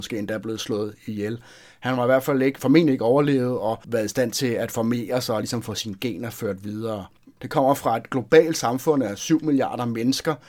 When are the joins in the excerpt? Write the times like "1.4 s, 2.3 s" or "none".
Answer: 7.4 s